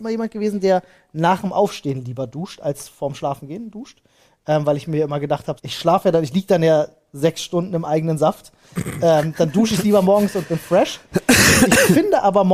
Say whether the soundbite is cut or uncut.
cut